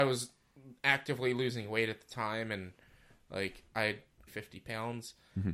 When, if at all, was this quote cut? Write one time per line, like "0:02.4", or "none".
0:04.3